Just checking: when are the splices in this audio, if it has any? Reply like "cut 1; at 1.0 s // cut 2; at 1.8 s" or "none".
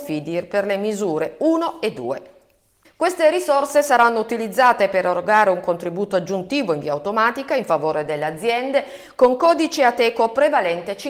cut 1; at 2.8 s